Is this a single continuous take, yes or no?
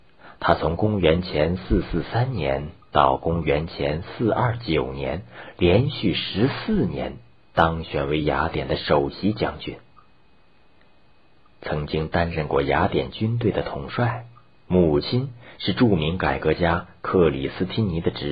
no